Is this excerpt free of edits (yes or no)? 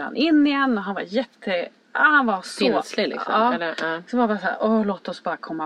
yes